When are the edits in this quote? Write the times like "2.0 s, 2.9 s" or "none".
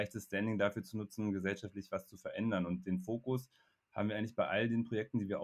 none